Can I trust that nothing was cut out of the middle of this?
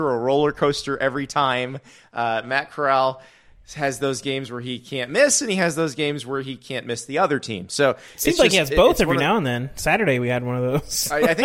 yes; 0 cuts

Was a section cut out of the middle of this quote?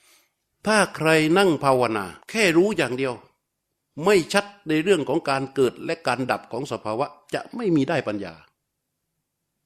yes; 1 cut; at 2.2 s

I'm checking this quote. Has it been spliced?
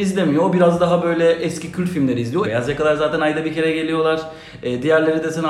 yes; 1 cut; at 2.4 s

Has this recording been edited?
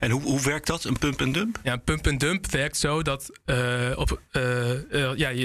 no; 0 cuts

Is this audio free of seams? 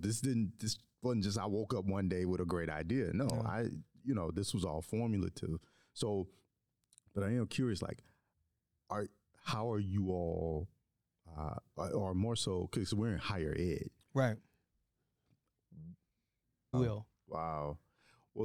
no; 1 cut; at 16.7 s

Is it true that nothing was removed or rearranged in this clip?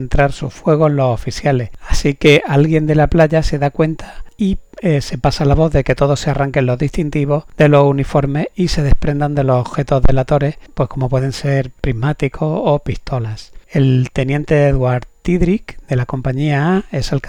yes; 0 cuts

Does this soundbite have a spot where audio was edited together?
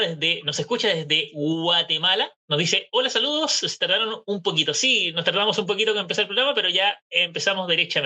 no; 0 cuts

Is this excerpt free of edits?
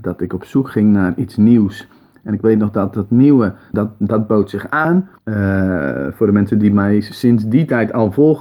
no; 2 cuts; at 3.7 s, 5.2 s

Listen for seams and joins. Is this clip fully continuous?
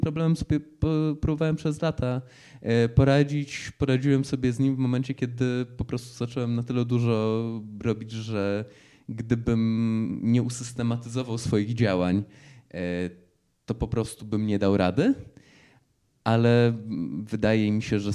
yes; 0 cuts

